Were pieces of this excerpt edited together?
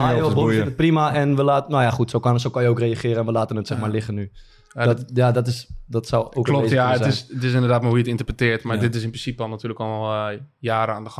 no; 0 cuts

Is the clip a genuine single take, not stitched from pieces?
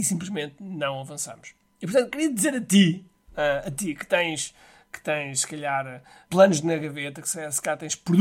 no; 1 cut; at 1.7 s

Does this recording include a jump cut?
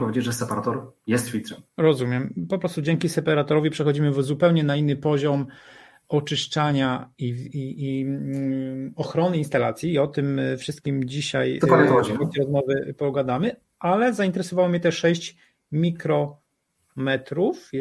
yes; 1 cut; at 1.7 s

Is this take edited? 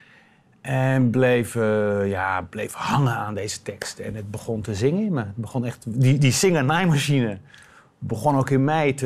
no; 0 cuts

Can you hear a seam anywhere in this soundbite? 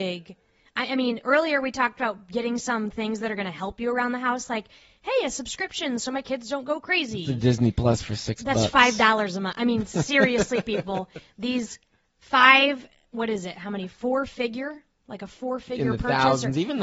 no; 0 cuts

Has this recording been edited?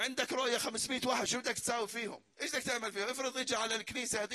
yes; 1 cut; at 2.3 s

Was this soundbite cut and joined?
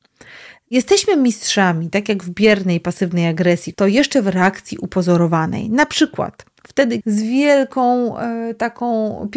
yes; 2 cuts; at 3.7 s, 7.0 s

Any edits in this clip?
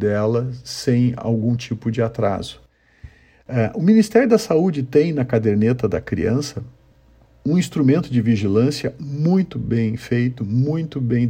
no; 0 cuts

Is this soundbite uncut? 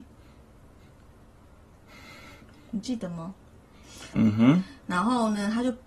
no; 1 cut; at 4.1 s

